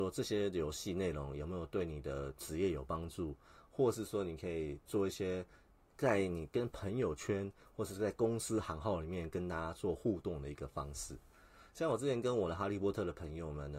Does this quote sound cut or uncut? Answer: uncut